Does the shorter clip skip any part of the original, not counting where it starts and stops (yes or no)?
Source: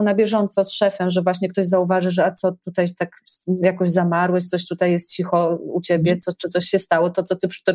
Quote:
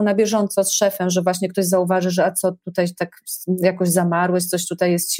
no